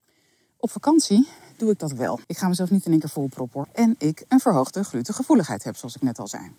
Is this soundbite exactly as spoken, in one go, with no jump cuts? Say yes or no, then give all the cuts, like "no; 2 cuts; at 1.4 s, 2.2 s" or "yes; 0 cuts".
no; 2 cuts; at 2.2 s, 3.6 s